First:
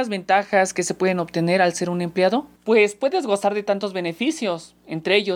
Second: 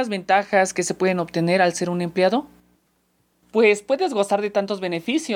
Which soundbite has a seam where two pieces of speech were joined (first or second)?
first